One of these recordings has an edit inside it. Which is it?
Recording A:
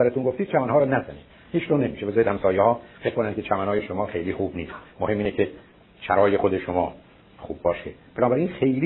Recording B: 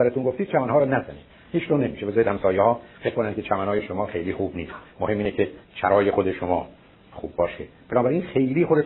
B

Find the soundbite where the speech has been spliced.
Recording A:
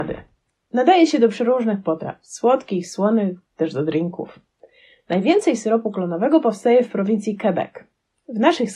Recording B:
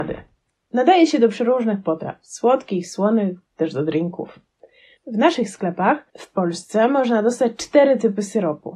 B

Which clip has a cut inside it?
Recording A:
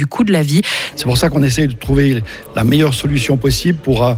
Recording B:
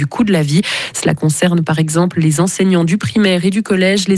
A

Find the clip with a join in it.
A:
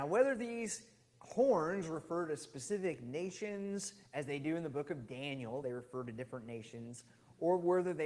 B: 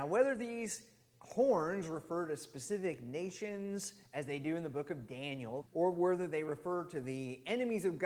B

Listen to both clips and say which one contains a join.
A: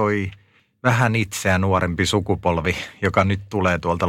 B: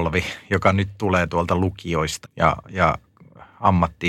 B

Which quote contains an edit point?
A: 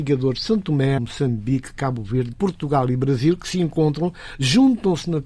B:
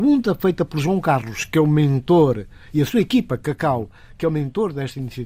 A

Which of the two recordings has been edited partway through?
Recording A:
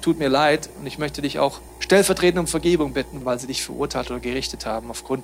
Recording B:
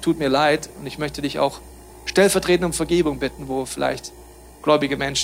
A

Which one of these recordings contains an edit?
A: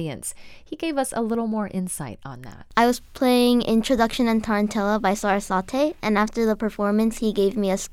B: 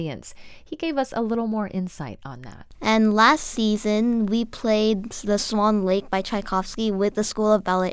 B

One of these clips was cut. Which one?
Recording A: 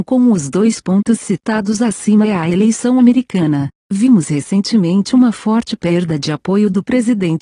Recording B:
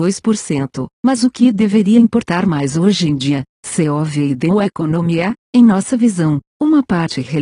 B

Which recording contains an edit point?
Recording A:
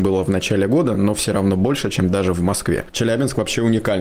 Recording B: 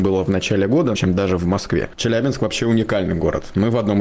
B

